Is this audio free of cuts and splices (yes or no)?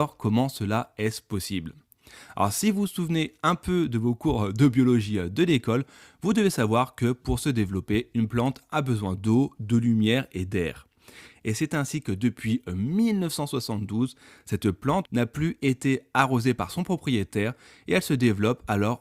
no